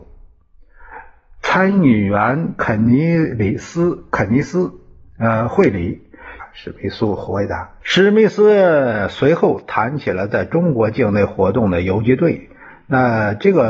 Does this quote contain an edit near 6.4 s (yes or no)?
yes